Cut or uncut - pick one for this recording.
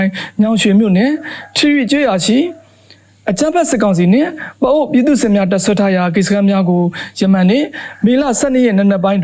uncut